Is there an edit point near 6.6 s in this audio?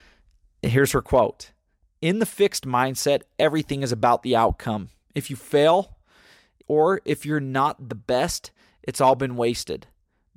yes; 1 cut; at 6.6 s

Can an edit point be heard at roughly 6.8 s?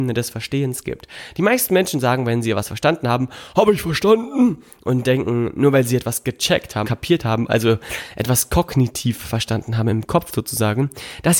yes; 1 cut; at 6.8 s

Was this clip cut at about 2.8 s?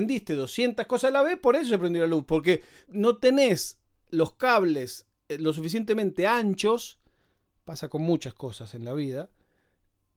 yes; 1 cut; at 2.8 s

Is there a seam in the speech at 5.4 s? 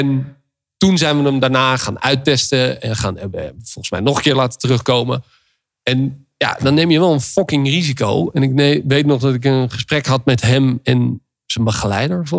no; 0 cuts

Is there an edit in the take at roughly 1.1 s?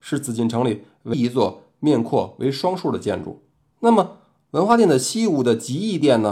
yes; 2 cuts; at 1.1 s, 3.7 s

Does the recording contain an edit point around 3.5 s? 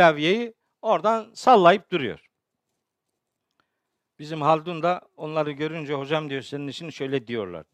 no; 0 cuts

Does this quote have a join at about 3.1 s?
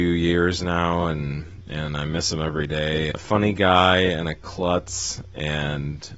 yes; 1 cut; at 3.1 s

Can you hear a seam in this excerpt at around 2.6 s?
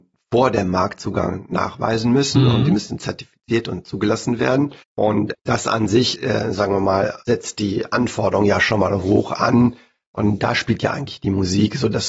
no; 1 cut; at 4.8 s

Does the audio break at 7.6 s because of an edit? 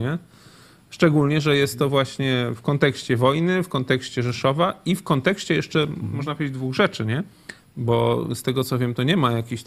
yes; 1 cut; at 7.6 s

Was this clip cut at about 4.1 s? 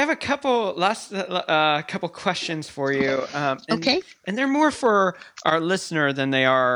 no; 0 cuts

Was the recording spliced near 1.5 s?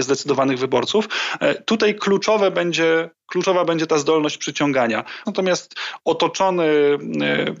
no; 1 cut; at 5.3 s

